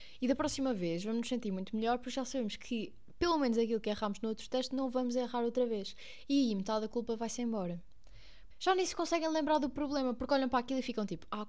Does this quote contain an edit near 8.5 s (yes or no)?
yes